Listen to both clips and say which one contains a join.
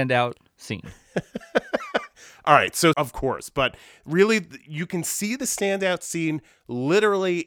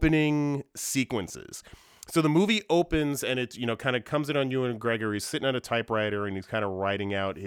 first; 1 cut; at 2.9 s

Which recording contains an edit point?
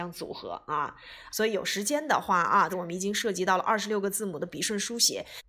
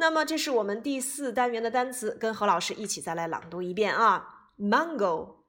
first; 2 cuts; at 1.3 s, 2.7 s

